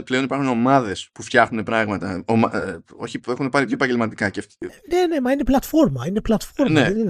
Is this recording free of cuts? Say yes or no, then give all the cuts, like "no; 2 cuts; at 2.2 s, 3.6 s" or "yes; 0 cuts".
no; 1 cut; at 3.2 s